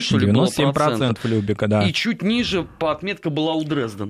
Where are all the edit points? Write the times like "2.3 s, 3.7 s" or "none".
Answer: none